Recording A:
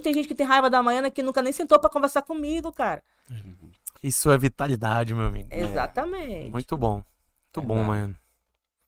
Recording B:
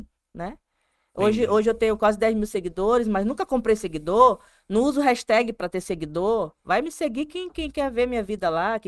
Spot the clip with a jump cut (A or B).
A